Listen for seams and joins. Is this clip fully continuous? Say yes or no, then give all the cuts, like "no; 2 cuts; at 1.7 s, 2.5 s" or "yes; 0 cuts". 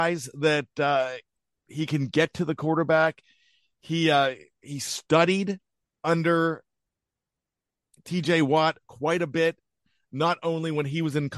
yes; 0 cuts